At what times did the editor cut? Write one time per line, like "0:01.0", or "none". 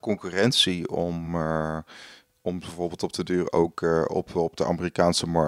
none